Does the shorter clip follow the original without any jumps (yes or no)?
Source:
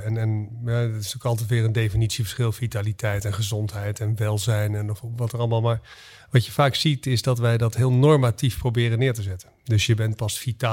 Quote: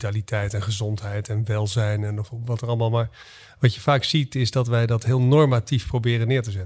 yes